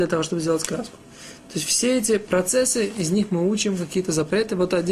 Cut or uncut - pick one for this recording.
uncut